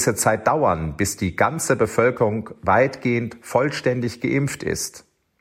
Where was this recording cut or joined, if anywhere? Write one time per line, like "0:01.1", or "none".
none